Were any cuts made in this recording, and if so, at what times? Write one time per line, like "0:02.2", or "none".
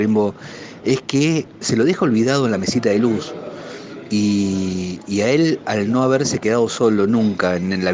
none